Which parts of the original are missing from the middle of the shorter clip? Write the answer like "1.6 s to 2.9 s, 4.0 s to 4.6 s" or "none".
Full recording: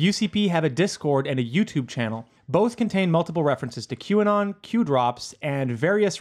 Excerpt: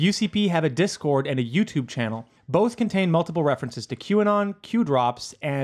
none